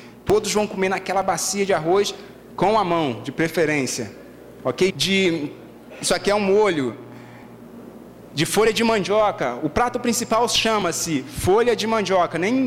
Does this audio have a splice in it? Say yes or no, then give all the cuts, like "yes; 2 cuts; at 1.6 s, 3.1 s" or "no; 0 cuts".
yes; 1 cut; at 4.9 s